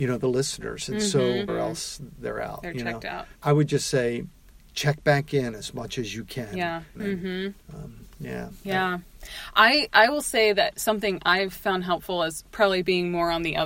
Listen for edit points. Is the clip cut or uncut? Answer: cut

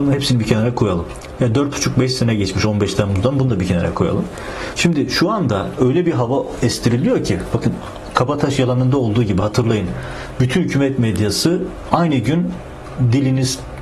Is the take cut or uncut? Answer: uncut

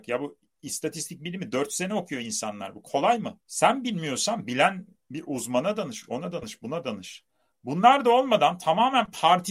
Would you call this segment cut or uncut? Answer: uncut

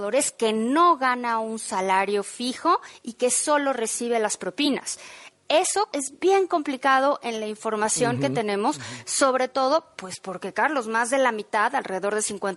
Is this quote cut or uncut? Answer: cut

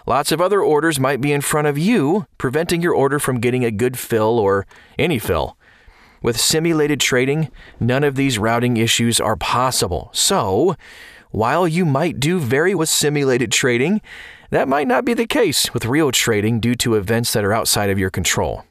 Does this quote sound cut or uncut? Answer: cut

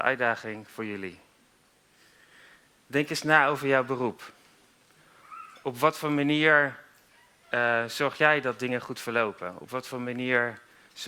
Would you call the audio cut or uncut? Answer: uncut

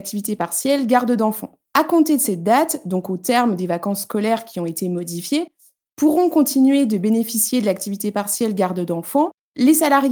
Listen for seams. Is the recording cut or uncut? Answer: uncut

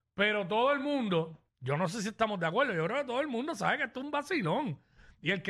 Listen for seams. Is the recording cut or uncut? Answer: cut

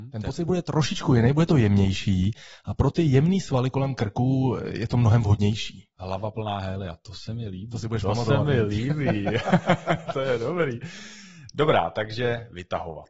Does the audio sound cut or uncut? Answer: uncut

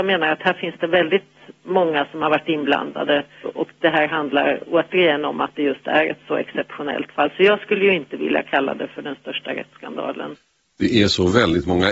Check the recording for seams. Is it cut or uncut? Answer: cut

